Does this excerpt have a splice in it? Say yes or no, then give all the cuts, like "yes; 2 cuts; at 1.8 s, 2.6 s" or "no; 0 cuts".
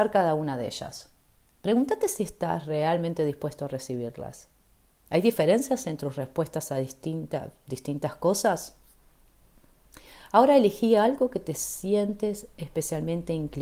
no; 0 cuts